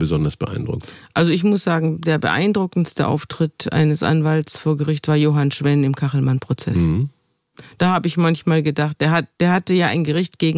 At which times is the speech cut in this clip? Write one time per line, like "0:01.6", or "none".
none